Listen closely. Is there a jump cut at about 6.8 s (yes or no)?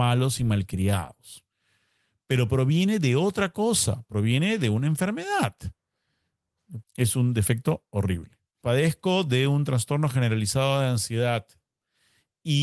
yes